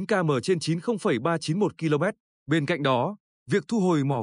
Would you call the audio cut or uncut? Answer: cut